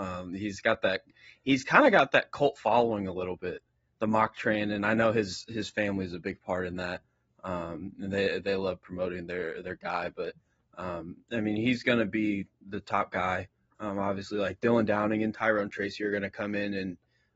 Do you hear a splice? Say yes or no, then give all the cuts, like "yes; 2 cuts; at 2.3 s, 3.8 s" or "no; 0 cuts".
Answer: no; 0 cuts